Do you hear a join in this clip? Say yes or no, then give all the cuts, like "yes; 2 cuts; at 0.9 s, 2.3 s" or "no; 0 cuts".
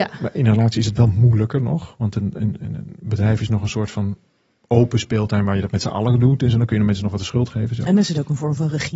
no; 0 cuts